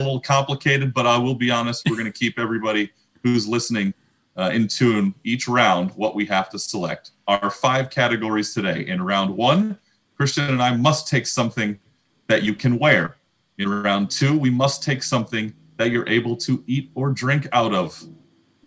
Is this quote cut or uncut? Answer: uncut